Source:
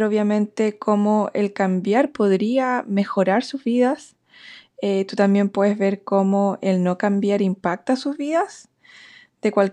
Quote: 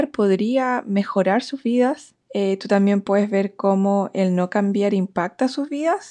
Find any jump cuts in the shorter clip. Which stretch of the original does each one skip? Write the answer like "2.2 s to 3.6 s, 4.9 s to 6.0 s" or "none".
4.2 s to 4.7 s